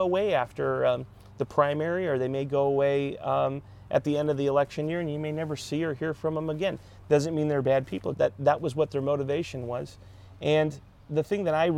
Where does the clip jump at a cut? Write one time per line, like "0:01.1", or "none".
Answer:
0:08.1